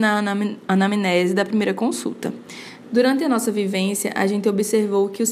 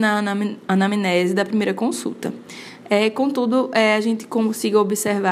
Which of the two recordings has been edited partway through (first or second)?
first